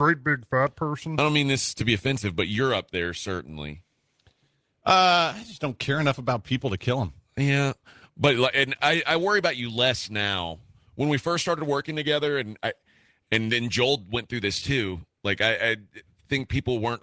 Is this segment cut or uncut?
uncut